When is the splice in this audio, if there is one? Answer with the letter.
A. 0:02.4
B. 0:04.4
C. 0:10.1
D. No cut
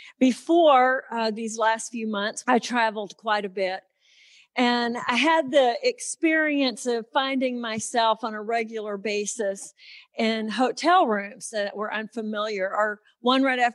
A